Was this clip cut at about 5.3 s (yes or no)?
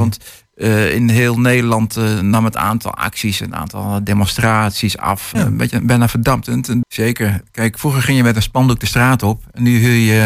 yes